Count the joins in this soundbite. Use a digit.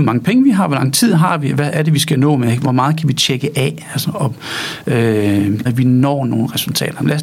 1